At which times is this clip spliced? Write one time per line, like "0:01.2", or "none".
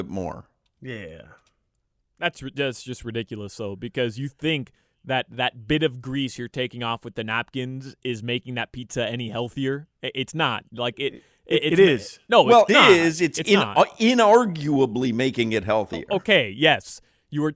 0:12.7